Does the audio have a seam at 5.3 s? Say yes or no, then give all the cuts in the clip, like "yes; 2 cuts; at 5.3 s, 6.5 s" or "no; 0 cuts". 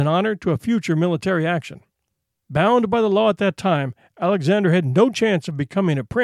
no; 1 cut; at 2.4 s